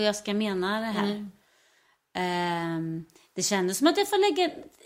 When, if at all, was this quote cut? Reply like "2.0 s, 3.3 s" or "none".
none